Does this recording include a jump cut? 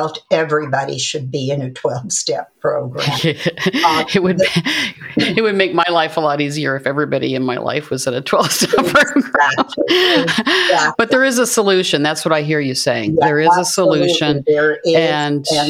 no; 0 cuts

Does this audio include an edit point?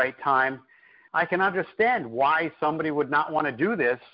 yes; 1 cut; at 1.1 s

